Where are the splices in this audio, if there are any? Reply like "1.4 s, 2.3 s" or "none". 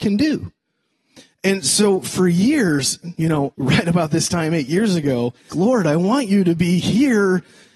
3.5 s, 5.5 s